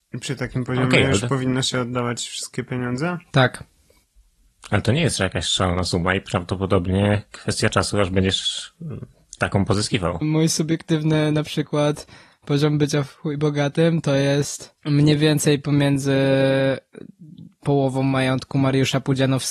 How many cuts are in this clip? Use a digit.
2